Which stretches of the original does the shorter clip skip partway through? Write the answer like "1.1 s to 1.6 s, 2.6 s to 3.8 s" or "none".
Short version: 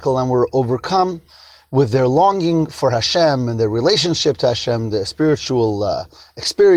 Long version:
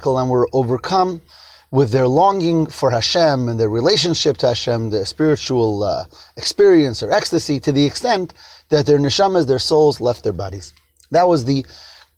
none

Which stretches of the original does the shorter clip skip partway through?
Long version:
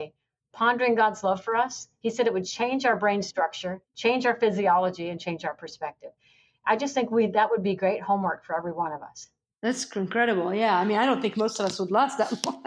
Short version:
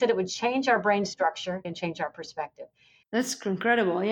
3.8 s to 5.1 s, 6.5 s to 9.5 s

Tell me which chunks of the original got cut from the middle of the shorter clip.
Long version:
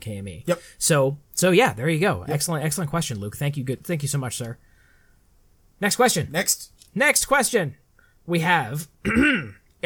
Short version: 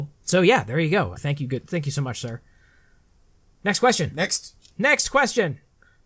2.3 s to 3.3 s

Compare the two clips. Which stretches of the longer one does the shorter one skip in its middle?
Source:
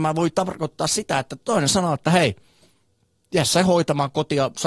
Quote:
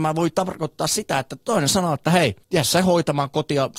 2.4 s to 3.2 s

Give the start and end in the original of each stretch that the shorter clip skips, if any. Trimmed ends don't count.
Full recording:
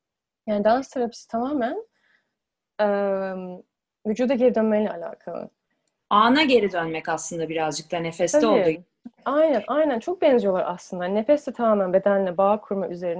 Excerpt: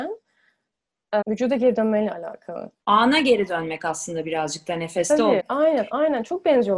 2.9 s to 4.0 s, 5.6 s to 6.0 s, 8.6 s to 9.2 s

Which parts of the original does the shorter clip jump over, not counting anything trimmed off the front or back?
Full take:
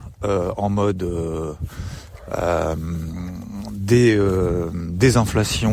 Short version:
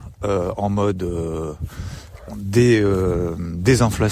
2.3 s to 3.6 s

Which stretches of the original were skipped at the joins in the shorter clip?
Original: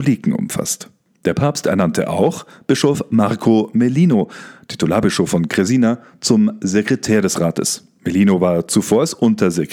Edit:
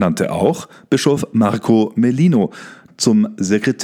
4.7 s to 6.1 s

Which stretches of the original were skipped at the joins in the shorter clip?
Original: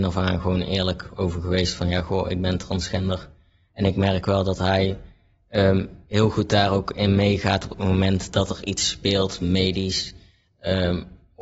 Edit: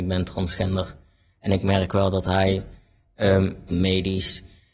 6.0 s to 9.4 s

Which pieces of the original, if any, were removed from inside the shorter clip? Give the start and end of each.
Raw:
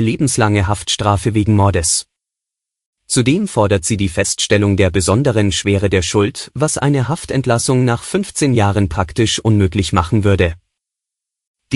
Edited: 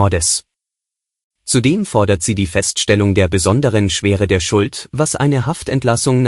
none

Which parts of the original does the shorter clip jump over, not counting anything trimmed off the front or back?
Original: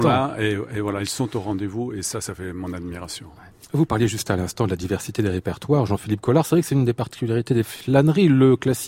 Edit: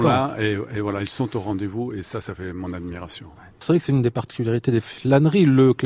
3.6 s to 6.4 s

